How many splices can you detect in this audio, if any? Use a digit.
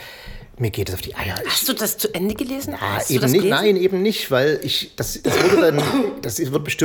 2